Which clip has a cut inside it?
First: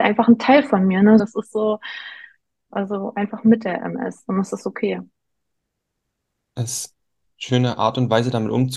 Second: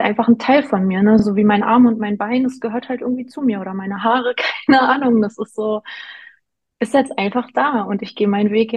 first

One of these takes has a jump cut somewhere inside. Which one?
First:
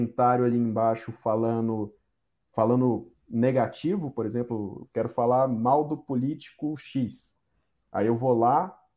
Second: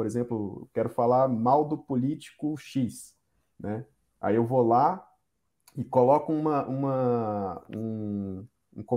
first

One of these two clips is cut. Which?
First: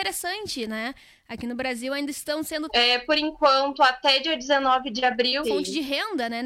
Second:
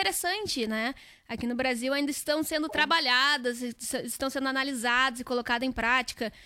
first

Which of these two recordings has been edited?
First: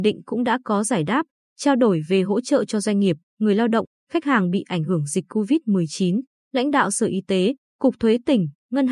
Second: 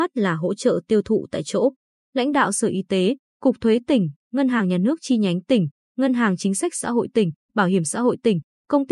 first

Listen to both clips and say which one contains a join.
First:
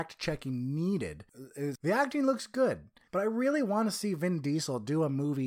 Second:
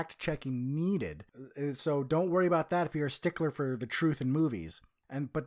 first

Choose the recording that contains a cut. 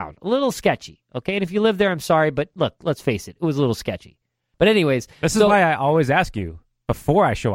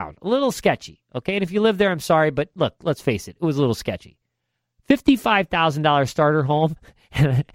first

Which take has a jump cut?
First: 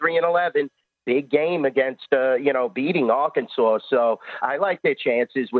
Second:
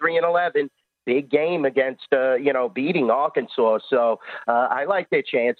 first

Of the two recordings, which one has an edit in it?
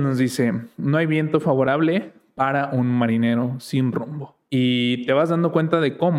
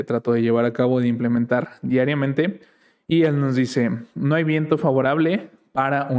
first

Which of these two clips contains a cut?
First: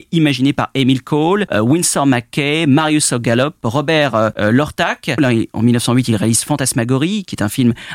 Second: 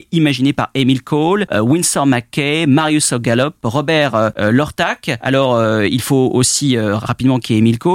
first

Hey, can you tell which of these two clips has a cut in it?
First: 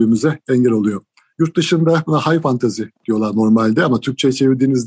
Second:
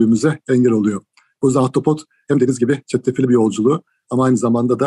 first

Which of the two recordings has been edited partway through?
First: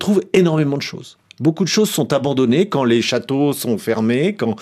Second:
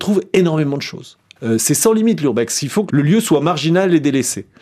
second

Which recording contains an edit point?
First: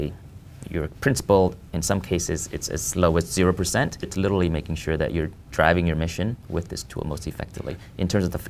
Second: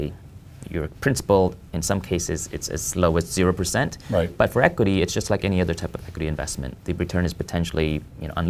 first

